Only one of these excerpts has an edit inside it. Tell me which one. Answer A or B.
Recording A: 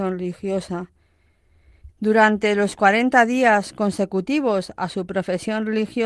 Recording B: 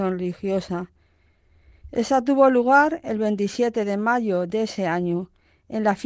A